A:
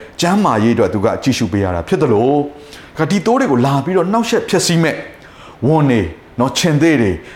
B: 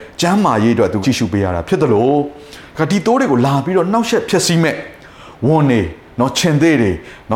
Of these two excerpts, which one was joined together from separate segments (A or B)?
B